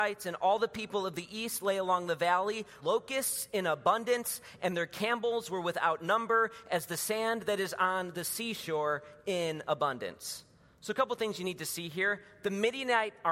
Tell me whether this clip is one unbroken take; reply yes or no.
no